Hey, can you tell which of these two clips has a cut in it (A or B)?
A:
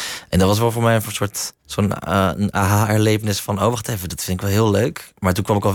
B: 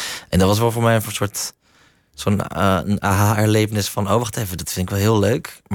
A